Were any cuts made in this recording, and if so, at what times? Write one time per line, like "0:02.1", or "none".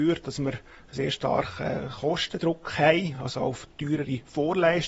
none